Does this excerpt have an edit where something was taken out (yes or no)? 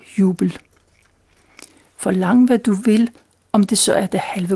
yes